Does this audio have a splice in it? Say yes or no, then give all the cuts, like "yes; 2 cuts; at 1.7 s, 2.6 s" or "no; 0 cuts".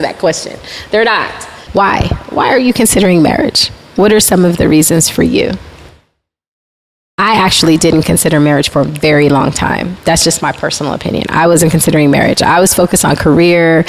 yes; 1 cut; at 1.7 s